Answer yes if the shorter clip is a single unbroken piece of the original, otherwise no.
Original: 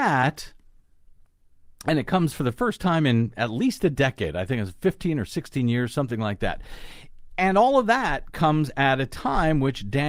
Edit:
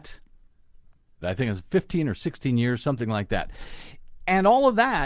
no